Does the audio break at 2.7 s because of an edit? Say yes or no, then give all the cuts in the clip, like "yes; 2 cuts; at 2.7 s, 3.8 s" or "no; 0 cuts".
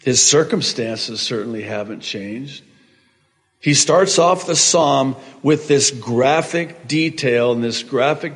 no; 0 cuts